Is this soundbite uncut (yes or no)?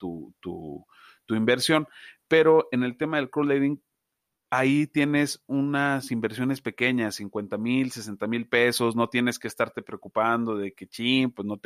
yes